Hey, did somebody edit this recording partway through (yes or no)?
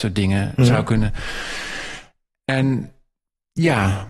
no